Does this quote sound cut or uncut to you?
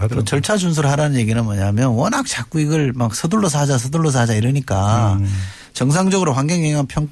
uncut